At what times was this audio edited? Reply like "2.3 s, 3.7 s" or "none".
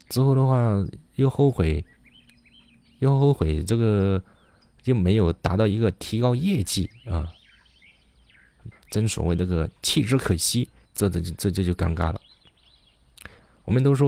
8.7 s, 10.9 s